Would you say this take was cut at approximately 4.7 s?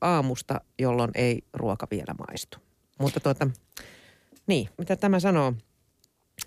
yes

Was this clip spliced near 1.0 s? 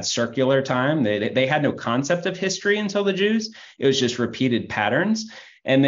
no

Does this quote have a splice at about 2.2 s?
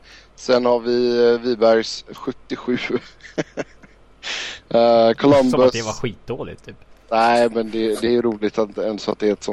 yes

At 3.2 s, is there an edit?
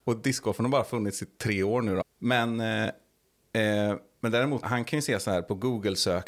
no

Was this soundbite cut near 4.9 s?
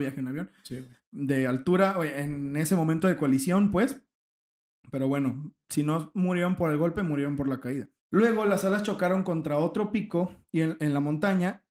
no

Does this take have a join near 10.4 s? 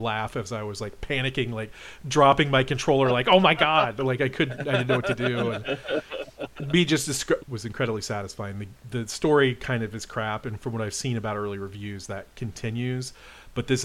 no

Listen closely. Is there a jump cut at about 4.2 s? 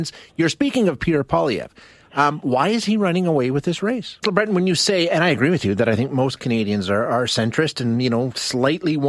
yes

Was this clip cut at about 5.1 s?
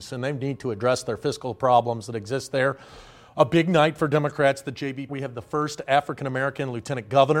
yes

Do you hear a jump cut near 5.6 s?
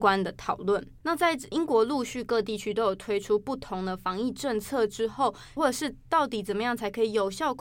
yes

